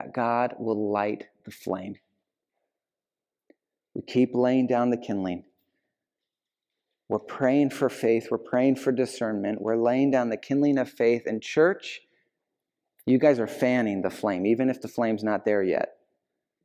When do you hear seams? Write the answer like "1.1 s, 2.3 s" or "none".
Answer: none